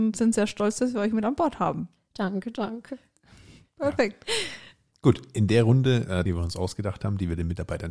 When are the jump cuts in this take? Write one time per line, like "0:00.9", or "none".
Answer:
0:06.3